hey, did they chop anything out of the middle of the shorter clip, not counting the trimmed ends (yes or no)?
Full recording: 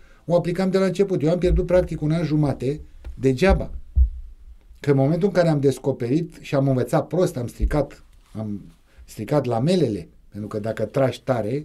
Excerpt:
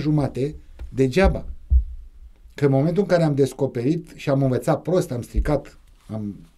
no